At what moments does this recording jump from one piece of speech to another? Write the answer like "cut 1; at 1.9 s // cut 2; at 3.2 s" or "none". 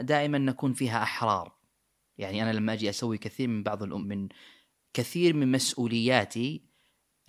cut 1; at 4.0 s